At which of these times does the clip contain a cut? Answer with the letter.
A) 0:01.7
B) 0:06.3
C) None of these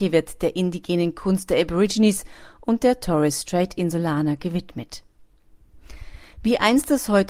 B